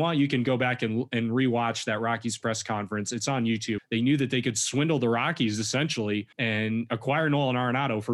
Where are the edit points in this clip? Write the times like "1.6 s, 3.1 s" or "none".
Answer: 3.8 s, 6.3 s